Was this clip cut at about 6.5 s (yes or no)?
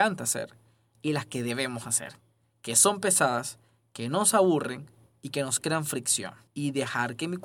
yes